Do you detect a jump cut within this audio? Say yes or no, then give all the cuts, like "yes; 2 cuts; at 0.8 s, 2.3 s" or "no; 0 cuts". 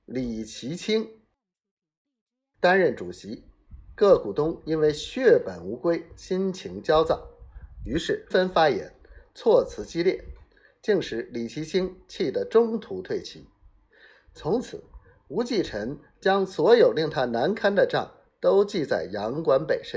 yes; 1 cut; at 8.3 s